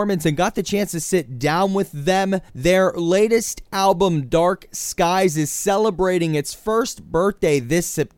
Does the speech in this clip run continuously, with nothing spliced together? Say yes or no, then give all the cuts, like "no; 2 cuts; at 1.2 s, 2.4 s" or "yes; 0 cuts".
no; 1 cut; at 2.5 s